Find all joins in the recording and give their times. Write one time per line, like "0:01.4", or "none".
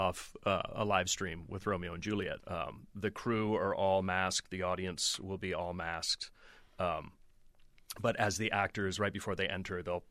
0:02.4